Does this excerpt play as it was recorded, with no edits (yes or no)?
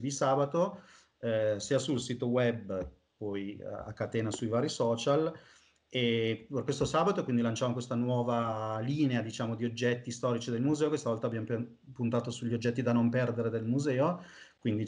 yes